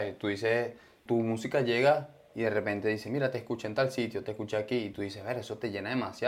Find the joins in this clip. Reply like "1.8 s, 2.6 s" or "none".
1.1 s